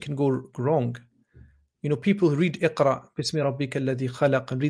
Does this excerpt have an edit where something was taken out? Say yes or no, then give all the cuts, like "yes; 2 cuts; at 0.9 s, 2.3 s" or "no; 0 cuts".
no; 0 cuts